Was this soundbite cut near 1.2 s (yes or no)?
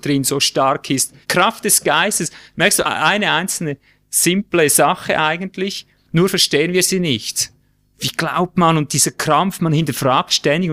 yes